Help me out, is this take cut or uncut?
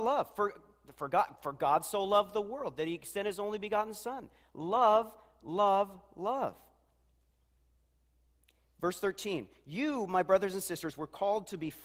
uncut